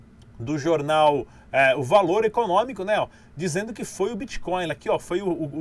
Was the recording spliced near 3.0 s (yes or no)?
no